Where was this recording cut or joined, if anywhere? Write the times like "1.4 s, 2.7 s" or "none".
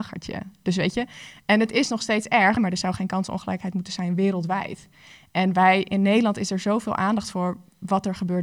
2.6 s